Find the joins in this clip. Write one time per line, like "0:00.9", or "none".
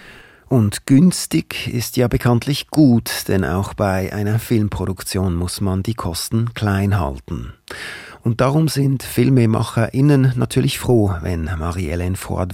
none